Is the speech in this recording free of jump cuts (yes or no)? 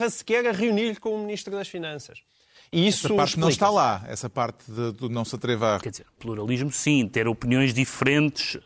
no